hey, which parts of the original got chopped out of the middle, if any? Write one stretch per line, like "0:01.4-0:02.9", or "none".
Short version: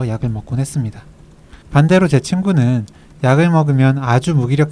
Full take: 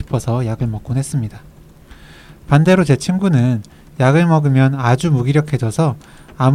0:02.0-0:02.4